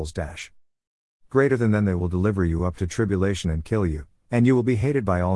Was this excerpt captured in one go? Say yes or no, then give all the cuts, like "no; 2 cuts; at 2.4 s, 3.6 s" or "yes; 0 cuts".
yes; 0 cuts